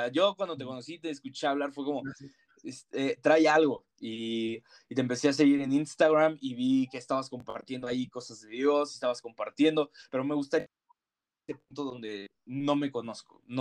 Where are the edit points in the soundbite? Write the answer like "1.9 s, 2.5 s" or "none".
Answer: none